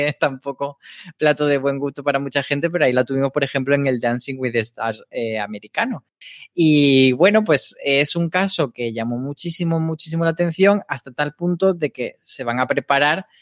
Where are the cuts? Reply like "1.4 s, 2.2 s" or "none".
none

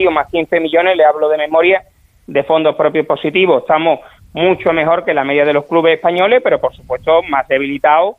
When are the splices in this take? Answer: none

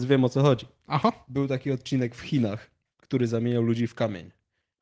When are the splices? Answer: 2.9 s

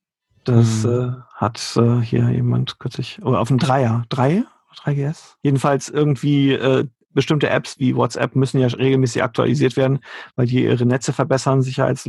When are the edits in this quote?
5.4 s

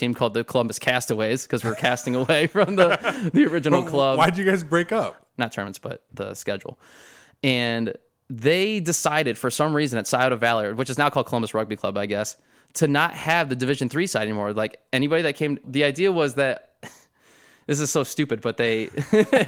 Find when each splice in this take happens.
5.3 s, 15.6 s

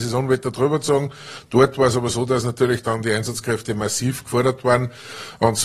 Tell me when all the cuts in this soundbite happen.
none

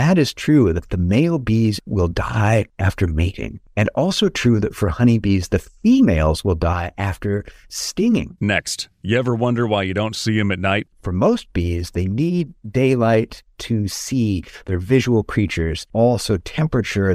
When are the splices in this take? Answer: none

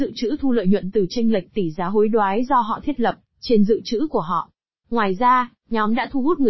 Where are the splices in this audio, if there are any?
4.8 s

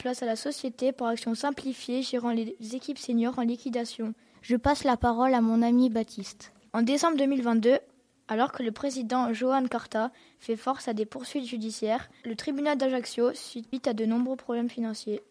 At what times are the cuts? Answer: 4.3 s, 6.7 s

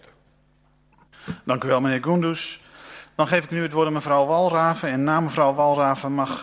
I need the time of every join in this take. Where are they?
none

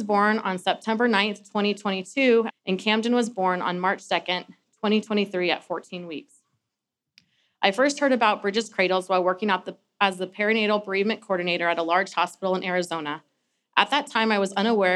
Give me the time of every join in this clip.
2.5 s

